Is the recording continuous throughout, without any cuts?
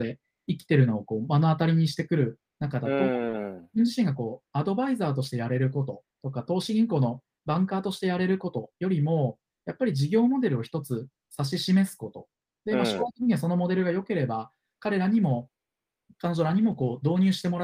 yes; 0 cuts

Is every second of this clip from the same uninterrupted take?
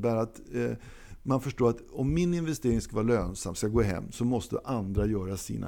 yes; 0 cuts

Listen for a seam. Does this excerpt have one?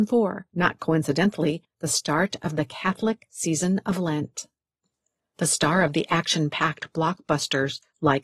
yes; 1 cut; at 1.7 s

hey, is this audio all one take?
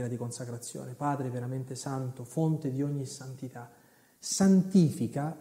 yes; 0 cuts

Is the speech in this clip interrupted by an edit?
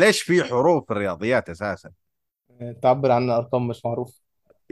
no; 0 cuts

